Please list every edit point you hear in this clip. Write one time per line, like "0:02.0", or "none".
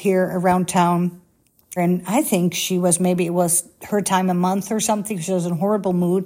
0:01.8